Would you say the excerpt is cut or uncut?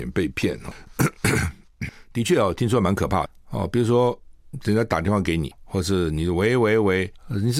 uncut